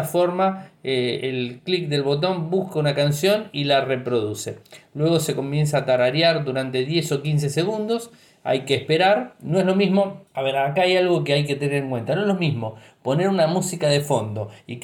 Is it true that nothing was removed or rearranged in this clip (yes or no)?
no